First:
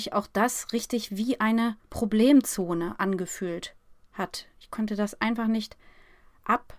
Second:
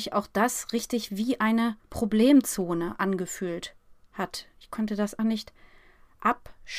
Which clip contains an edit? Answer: second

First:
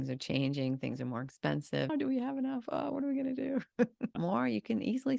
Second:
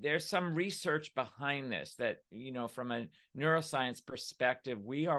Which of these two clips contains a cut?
first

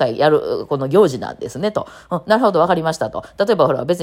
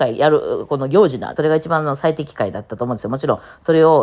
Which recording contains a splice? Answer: second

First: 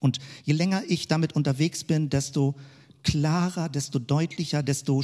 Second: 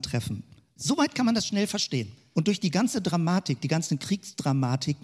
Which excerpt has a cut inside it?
second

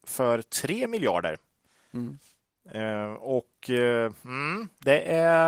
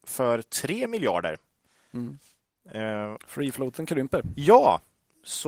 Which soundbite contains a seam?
second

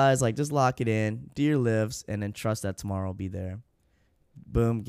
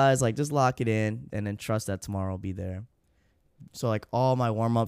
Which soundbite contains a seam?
second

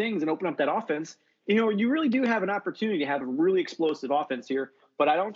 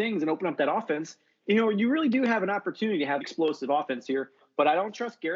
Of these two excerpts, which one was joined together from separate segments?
second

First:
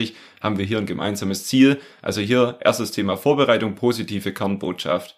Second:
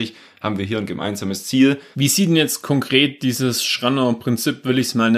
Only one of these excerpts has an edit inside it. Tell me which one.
second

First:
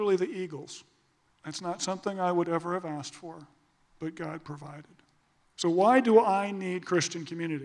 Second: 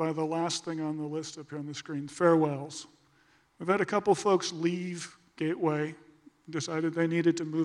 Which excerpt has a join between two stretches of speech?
first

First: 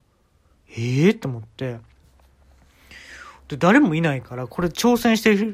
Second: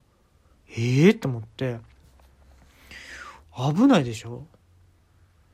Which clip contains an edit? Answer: second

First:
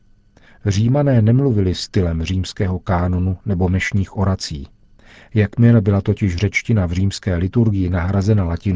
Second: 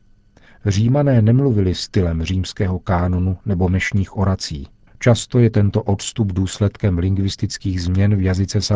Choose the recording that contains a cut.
second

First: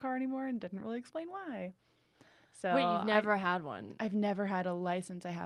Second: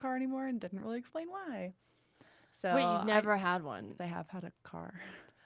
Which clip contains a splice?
second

